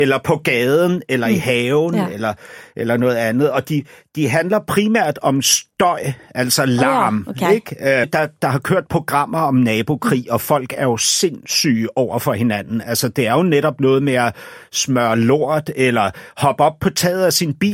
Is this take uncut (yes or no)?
no